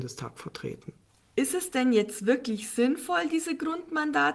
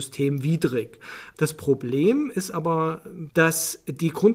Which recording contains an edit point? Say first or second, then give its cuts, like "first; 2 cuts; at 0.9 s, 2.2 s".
second; 1 cut; at 3.3 s